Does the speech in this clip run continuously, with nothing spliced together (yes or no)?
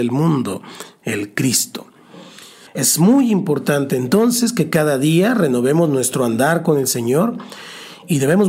no